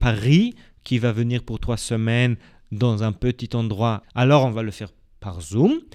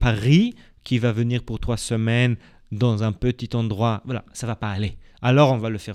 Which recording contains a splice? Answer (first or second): first